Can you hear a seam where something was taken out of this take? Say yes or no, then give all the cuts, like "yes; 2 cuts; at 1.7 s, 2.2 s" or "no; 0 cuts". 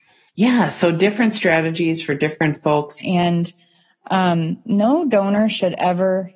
yes; 1 cut; at 3.0 s